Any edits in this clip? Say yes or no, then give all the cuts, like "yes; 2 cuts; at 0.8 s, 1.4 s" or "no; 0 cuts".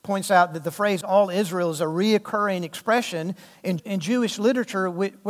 yes; 1 cut; at 3.8 s